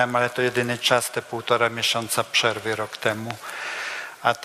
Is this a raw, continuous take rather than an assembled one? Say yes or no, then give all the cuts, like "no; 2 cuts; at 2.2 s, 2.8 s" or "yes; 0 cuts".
yes; 0 cuts